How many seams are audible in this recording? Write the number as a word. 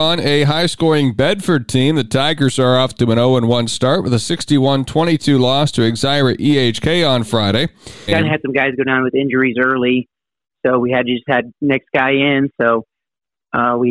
one